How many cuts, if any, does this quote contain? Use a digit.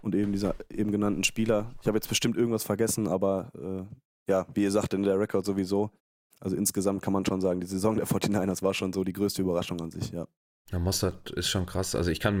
0